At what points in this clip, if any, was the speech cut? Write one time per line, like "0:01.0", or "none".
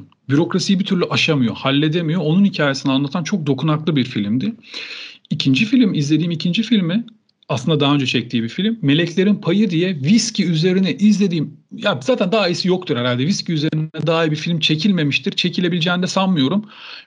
none